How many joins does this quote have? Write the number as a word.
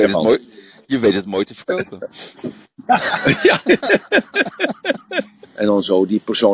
one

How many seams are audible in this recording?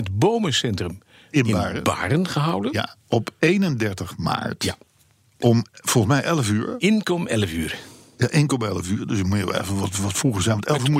zero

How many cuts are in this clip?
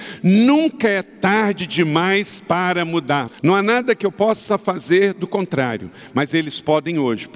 one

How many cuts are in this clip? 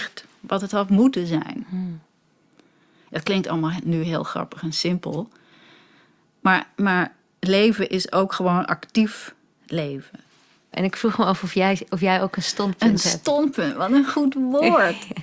one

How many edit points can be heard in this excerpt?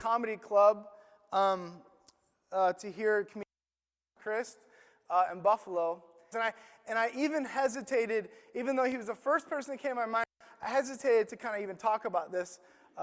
one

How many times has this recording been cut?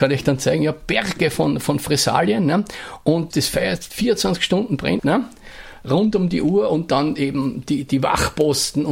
two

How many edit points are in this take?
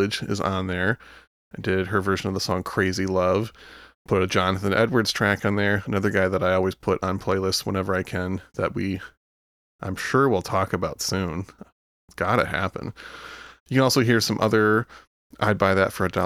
zero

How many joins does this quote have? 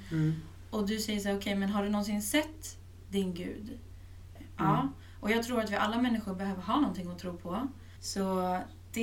two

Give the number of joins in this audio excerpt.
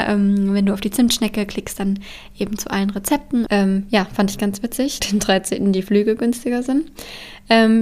two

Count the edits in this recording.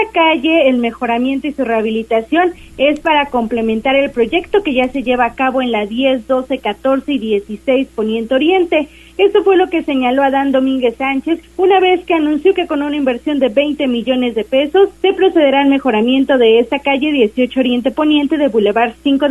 two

